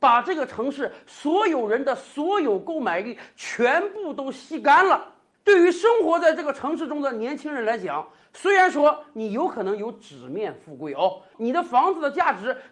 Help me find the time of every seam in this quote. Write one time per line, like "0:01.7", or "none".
0:05.3

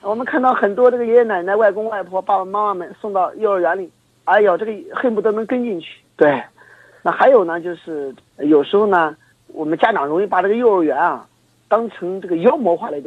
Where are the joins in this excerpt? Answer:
0:01.1
0:06.0

